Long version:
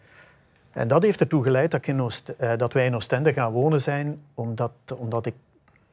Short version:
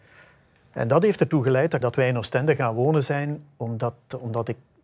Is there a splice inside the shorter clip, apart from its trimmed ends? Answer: yes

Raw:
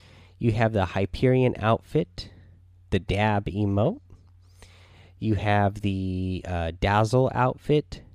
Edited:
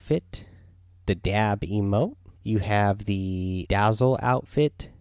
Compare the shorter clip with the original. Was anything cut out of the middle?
yes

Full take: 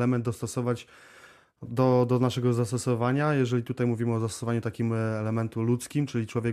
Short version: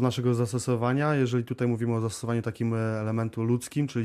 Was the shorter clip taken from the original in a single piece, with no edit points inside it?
yes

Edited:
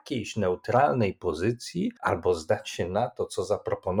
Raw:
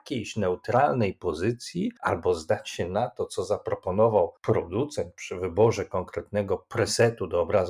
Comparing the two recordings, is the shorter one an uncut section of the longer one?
yes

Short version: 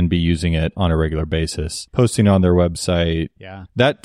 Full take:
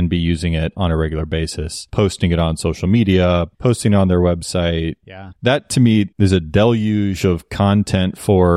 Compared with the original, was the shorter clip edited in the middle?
yes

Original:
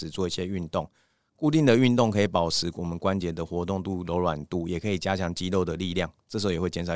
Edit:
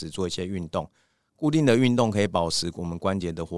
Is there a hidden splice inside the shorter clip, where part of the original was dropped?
no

